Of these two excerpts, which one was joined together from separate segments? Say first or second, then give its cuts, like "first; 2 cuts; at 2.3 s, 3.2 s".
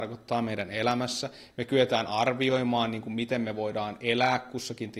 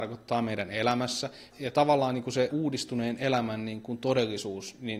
second; 2 cuts; at 1.5 s, 2.5 s